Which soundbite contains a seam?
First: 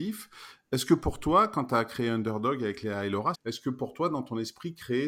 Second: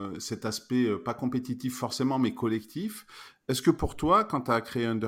first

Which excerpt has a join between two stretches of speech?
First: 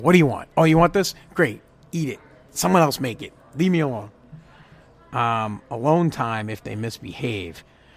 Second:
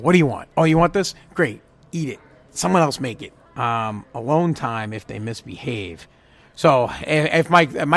second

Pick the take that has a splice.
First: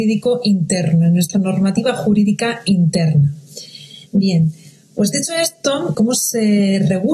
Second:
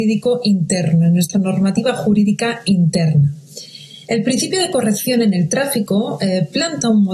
first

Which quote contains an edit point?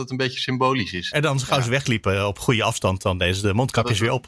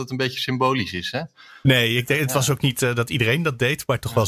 first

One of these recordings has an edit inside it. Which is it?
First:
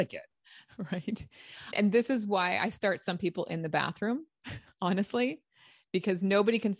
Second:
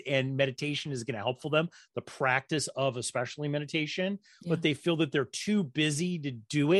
first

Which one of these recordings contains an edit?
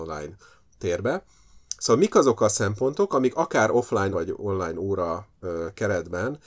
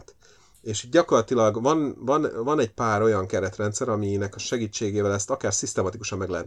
first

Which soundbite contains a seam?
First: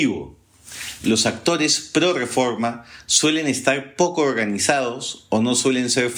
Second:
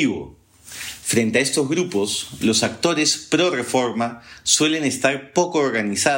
first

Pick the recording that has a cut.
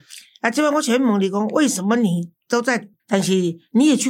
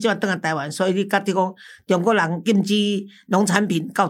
first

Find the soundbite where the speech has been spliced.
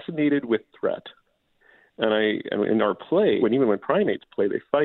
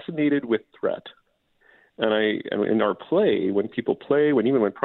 first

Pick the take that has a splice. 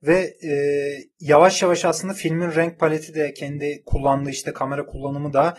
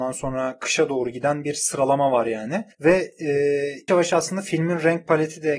second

